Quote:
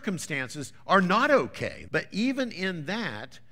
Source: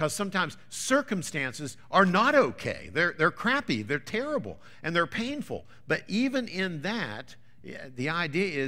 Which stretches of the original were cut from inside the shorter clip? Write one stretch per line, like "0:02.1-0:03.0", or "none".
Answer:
0:02.9-0:05.8